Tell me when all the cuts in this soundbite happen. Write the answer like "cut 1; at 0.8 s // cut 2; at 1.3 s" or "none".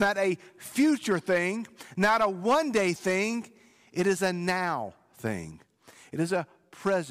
none